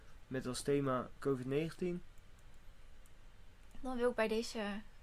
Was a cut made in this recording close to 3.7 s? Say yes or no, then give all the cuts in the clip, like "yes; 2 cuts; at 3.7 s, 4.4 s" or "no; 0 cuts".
yes; 1 cut; at 3.7 s